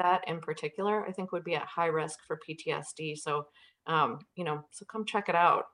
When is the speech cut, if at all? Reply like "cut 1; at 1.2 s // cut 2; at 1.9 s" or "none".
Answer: none